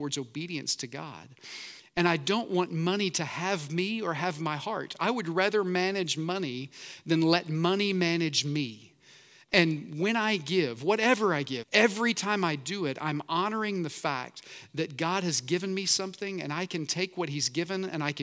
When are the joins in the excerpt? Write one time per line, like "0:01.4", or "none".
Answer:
0:11.6